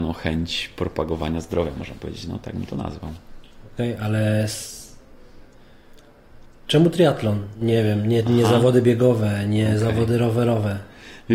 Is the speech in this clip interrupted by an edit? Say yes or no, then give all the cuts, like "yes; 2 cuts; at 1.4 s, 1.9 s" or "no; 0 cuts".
no; 0 cuts